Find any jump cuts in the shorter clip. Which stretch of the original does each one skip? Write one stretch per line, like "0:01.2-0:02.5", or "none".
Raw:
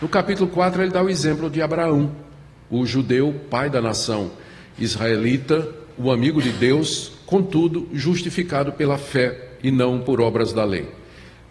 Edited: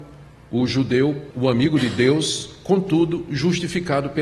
0:03.5-0:05.9